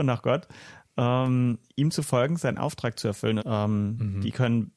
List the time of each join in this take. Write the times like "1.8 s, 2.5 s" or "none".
3.4 s